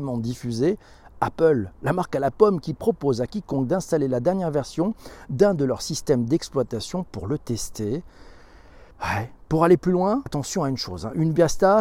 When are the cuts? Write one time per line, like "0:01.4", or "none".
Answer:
0:08.9
0:10.3

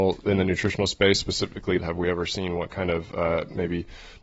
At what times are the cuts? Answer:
0:01.8

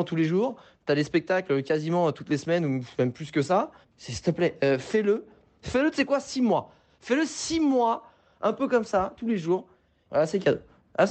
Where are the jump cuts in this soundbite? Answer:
0:03.8
0:10.1

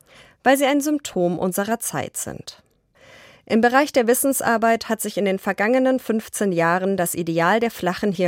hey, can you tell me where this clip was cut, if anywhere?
none

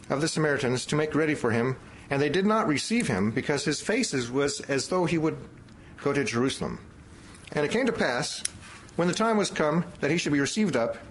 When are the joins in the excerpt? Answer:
0:07.5

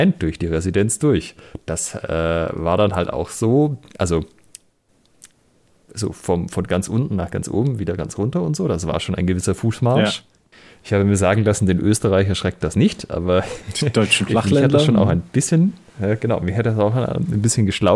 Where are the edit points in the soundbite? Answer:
none

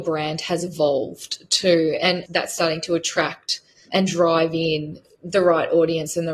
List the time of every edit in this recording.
0:02.3

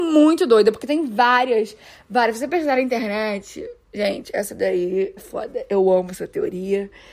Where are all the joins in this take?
0:05.2

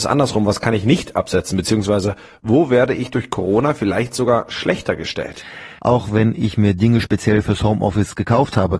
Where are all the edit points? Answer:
0:05.8

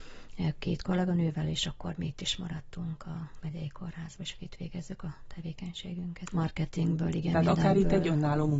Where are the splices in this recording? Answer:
0:06.3

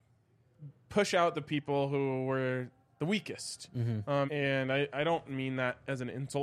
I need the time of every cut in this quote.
0:04.3

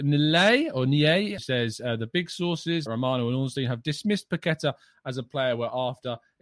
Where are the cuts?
0:01.4
0:02.9

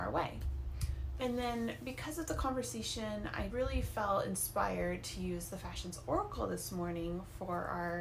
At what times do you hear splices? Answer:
0:01.2
0:03.5

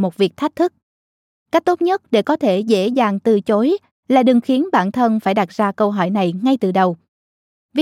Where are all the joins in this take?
none

